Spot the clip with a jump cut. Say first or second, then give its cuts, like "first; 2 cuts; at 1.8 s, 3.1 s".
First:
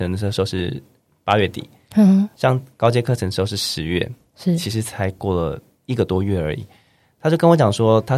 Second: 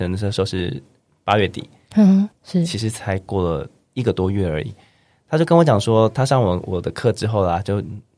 second; 1 cut; at 2.3 s